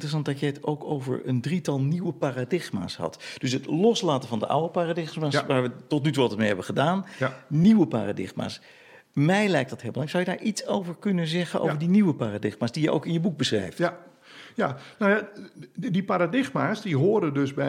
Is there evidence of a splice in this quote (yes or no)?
no